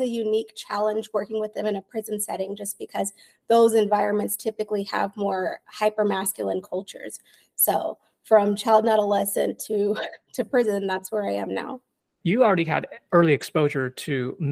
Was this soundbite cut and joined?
no; 0 cuts

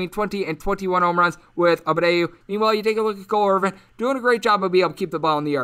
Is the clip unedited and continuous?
no; 1 cut; at 2.4 s

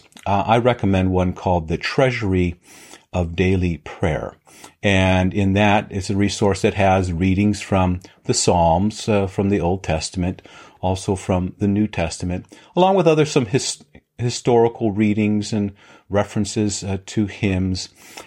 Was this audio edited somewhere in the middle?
no; 0 cuts

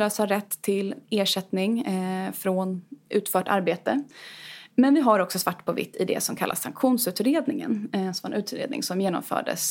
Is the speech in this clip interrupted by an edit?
no; 0 cuts

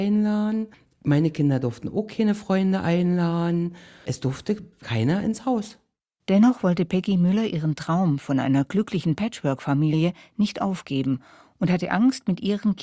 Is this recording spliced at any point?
no; 0 cuts

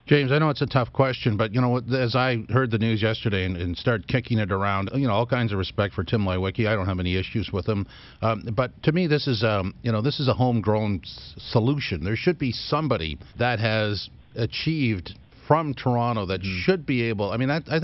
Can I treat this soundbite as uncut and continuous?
no; 2 cuts; at 4.9 s, 13.3 s

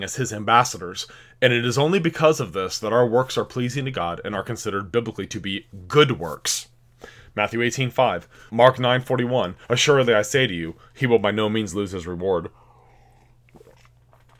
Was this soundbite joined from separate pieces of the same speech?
yes; 2 cuts; at 8.5 s, 9.6 s

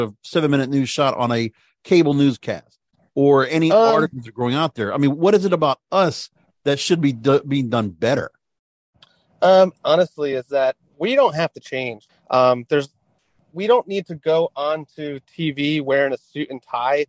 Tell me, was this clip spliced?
yes; 2 cuts; at 9.7 s, 12.1 s

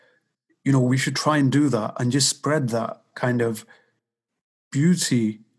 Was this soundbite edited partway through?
no; 0 cuts

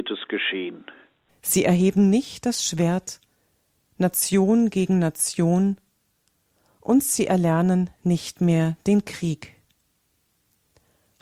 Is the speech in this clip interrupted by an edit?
yes; 1 cut; at 1.3 s

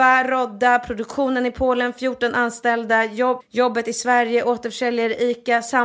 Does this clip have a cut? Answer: yes; 1 cut; at 3.4 s

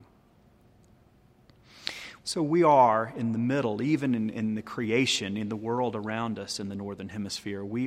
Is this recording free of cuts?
no; 1 cut; at 2.2 s

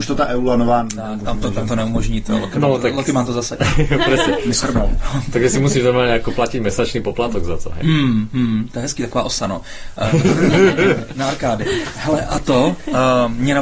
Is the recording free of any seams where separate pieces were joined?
yes; 0 cuts

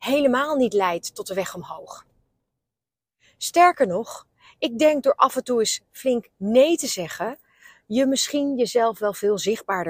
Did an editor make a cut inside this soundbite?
no; 0 cuts

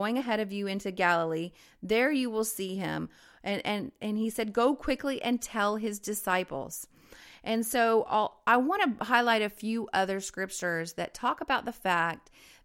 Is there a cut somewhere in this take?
no; 0 cuts

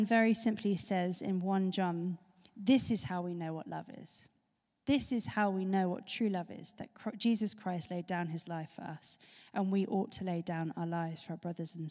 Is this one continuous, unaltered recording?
yes; 0 cuts

